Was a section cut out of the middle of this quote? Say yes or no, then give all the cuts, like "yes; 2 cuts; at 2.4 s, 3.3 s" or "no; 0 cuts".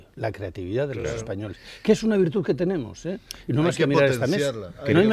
no; 0 cuts